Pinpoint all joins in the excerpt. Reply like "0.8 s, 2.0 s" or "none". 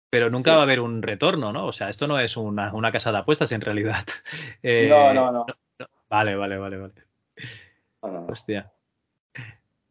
none